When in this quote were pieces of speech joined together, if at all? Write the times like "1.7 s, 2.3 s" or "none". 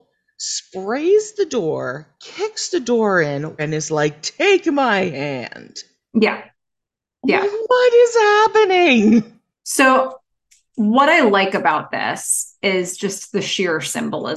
3.6 s